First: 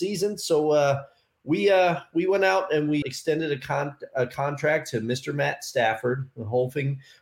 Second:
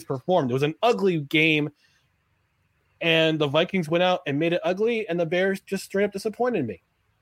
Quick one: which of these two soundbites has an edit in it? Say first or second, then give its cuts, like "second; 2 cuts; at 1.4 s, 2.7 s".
first; 1 cut; at 3.0 s